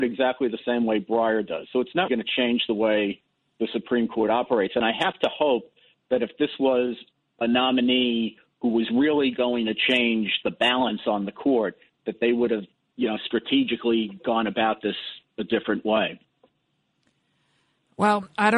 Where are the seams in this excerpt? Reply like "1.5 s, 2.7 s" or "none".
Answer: 2.1 s

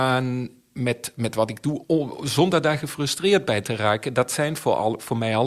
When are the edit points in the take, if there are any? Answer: 1.8 s

